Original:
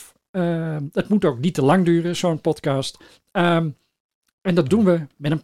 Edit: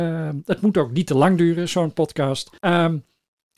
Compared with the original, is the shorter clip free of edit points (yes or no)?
no